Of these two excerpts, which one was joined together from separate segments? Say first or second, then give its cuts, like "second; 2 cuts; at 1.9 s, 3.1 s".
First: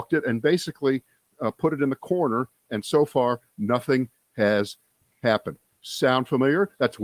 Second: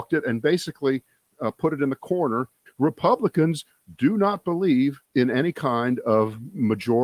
second; 2 cuts; at 2.7 s, 5.0 s